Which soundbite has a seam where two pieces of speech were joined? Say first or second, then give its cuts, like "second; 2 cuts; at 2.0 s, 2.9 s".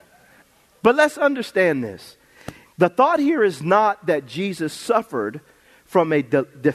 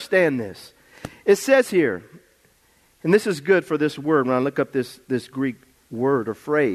first; 1 cut; at 2.6 s